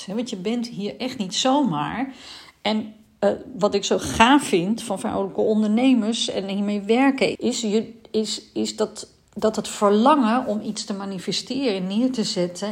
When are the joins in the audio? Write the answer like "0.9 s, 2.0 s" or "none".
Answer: 7.4 s